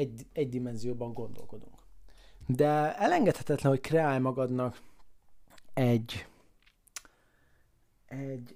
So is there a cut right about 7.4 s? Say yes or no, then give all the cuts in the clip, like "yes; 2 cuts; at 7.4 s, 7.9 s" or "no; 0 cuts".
no; 1 cut; at 2.4 s